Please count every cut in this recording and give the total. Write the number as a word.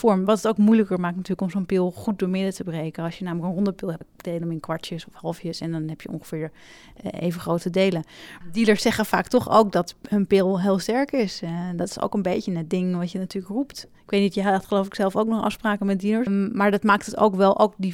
three